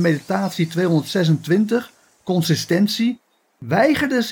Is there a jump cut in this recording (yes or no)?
no